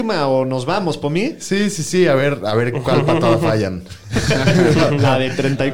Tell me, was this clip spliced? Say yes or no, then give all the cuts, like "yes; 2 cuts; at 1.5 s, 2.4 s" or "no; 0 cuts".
no; 0 cuts